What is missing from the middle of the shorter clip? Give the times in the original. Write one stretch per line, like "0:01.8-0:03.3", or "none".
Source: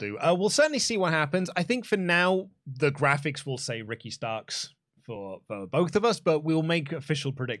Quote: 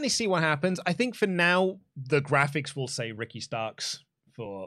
none